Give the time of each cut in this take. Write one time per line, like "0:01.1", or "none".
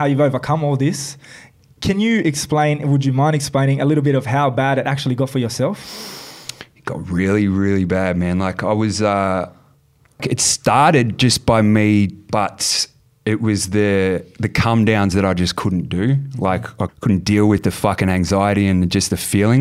0:10.2
0:12.3
0:16.9